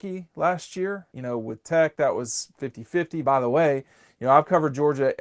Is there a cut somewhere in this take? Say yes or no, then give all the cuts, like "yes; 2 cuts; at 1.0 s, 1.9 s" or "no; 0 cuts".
yes; 2 cuts; at 1.1 s, 3.2 s